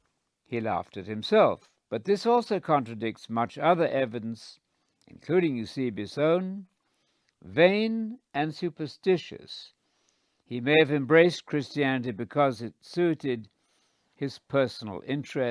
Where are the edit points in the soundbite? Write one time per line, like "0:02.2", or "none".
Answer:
0:01.8